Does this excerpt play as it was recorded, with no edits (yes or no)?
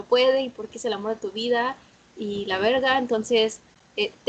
yes